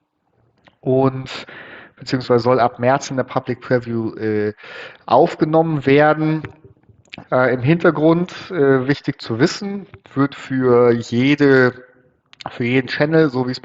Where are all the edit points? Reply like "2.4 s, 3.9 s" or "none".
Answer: 7.2 s, 10.0 s